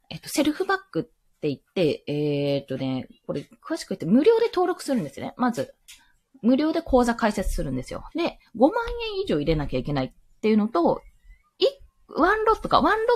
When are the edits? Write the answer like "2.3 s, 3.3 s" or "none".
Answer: 8.1 s